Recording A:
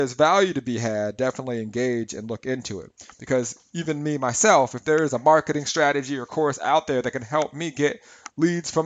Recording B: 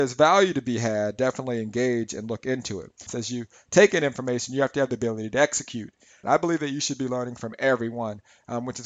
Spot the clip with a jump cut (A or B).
B